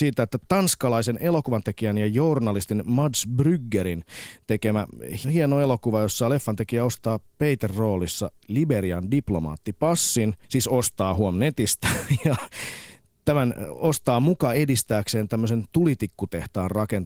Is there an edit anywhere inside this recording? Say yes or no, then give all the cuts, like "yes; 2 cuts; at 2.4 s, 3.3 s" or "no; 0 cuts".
yes; 2 cuts; at 5.2 s, 10.4 s